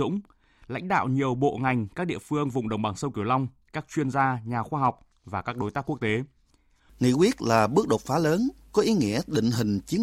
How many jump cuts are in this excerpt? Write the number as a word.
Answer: one